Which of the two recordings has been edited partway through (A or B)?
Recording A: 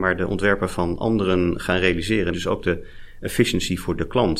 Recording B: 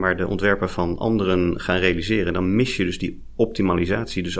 A